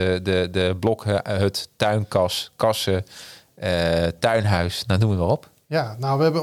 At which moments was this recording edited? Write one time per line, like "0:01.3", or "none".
none

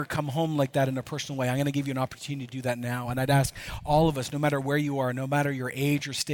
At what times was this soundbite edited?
none

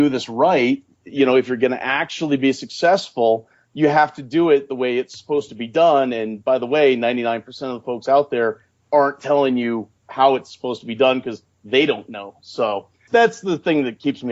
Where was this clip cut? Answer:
0:13.1

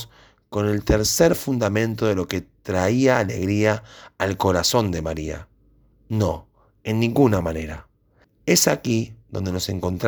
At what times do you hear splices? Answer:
0:05.9
0:08.2

